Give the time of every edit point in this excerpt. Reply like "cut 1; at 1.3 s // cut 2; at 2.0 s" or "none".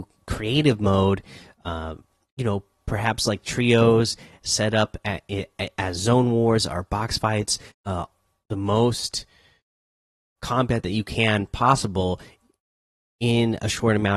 cut 1; at 7.7 s // cut 2; at 10.4 s